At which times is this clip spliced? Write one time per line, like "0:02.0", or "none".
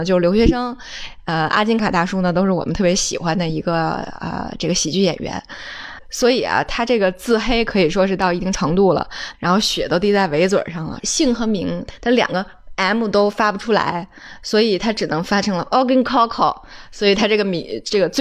0:01.8
0:09.3
0:11.0